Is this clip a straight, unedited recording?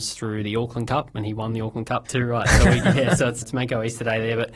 no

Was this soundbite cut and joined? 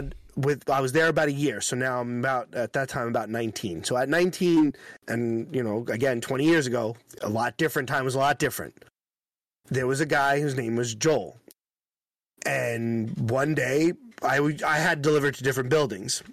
no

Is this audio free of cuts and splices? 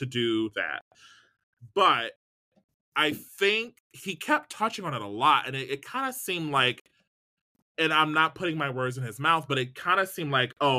yes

